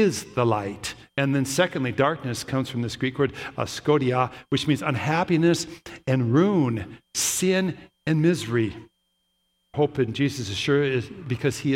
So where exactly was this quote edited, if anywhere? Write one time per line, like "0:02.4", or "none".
0:09.7